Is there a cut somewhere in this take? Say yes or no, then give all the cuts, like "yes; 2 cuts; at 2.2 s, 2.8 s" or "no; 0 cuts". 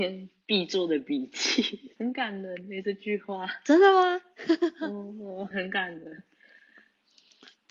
yes; 2 cuts; at 2.0 s, 5.5 s